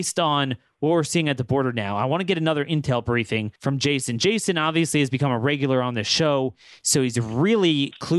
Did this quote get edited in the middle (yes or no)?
yes